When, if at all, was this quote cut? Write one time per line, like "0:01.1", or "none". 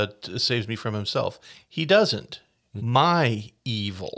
0:02.8